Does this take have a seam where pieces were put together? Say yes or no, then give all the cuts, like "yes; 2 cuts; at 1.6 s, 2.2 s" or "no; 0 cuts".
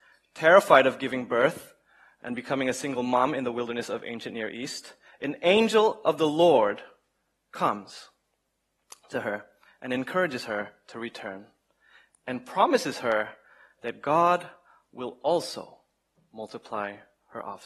no; 0 cuts